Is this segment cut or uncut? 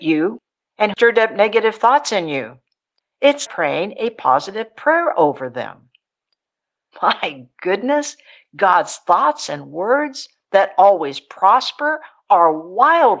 cut